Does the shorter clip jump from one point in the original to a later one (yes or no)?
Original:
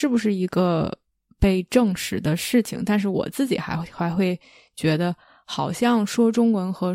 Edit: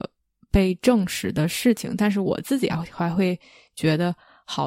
yes